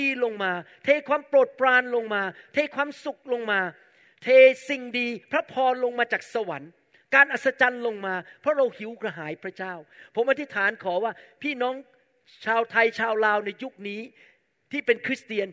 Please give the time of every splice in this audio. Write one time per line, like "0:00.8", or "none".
none